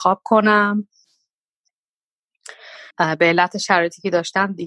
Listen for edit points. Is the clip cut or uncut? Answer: cut